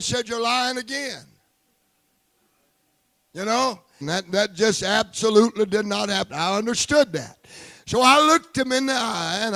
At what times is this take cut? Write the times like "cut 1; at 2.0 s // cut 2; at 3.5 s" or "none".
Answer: cut 1; at 4.0 s // cut 2; at 6.3 s